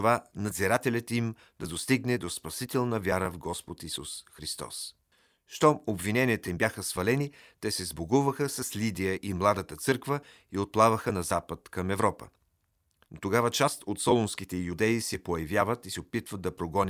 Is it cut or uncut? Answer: cut